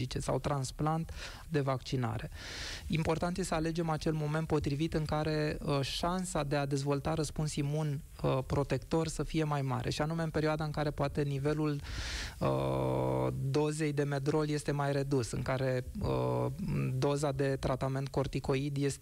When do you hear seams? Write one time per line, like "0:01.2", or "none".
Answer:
0:01.4